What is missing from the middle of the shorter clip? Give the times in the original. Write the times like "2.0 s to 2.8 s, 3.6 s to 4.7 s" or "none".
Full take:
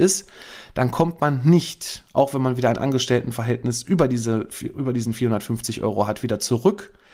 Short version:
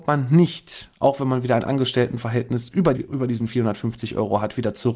4.1 s to 4.6 s